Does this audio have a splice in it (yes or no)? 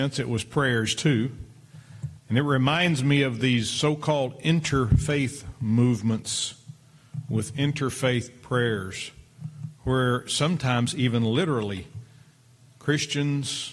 yes